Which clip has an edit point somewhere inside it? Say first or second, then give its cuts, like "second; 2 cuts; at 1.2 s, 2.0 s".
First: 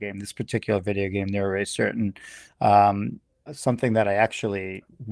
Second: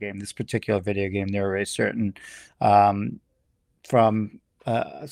first; 1 cut; at 3.5 s